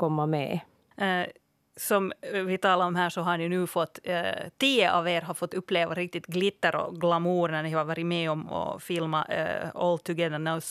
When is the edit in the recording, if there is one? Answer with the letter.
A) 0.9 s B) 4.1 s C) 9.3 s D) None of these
A